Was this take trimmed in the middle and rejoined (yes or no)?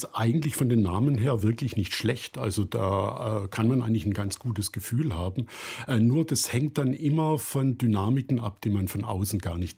no